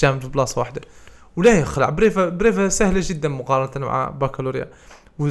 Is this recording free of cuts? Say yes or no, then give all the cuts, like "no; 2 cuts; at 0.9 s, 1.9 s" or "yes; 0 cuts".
yes; 0 cuts